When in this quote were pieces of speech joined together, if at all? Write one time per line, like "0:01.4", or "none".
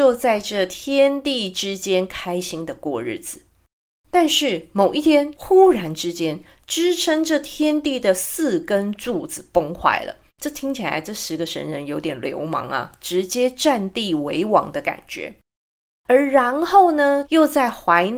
0:10.3
0:17.2